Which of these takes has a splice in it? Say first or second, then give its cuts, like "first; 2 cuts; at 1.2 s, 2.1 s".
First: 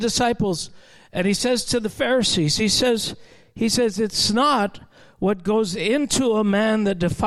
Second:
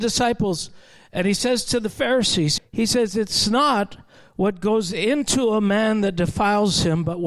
second; 1 cut; at 2.6 s